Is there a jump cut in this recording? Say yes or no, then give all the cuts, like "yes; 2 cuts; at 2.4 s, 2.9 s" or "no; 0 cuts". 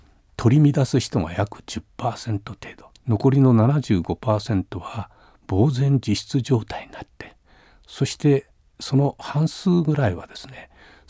yes; 1 cut; at 3.0 s